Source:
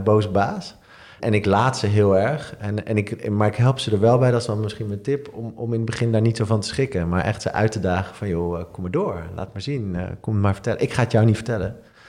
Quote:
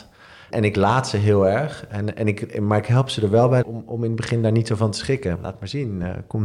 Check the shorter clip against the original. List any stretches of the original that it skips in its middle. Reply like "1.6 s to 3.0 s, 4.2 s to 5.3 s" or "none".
4.3 s to 5.3 s, 7.0 s to 9.3 s